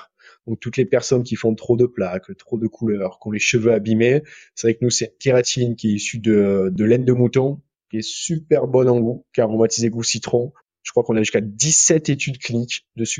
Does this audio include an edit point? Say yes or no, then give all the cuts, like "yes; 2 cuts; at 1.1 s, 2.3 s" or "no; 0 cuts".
no; 0 cuts